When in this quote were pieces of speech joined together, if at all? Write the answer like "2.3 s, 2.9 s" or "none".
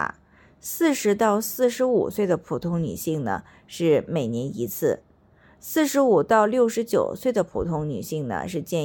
none